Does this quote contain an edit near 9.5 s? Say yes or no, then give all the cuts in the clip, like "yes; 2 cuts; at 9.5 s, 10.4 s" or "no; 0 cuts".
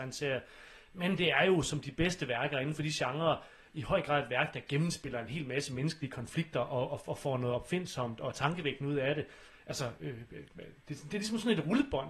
yes; 1 cut; at 9.5 s